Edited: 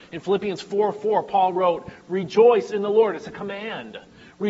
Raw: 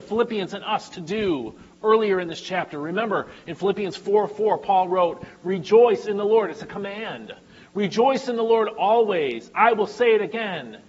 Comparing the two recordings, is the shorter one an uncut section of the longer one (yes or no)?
yes